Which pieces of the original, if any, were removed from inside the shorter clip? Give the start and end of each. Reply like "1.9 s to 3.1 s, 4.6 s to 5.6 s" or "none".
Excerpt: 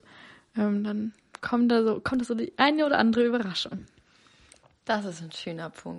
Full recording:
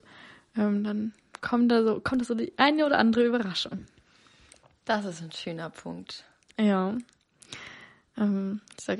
none